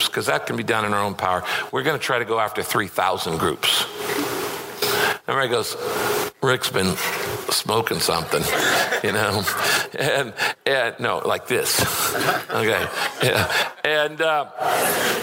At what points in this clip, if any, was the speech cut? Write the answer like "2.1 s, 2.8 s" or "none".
none

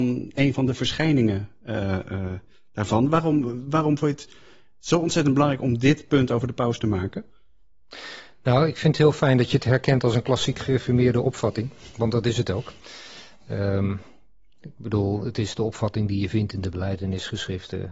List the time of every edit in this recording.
none

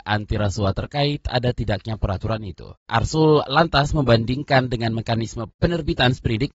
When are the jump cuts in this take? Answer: none

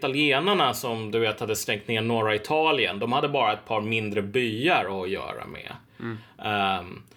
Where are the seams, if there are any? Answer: none

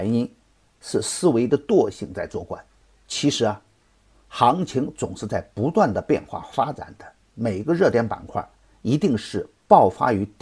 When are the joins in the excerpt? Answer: none

